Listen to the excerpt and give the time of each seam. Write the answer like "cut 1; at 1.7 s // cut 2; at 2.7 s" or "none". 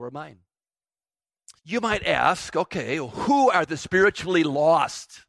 cut 1; at 1.6 s